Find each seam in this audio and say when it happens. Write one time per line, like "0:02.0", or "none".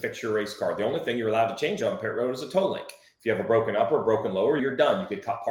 0:04.6